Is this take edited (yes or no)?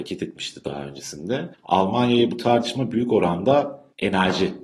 yes